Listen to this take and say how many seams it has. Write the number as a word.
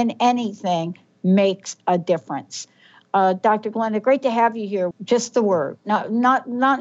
one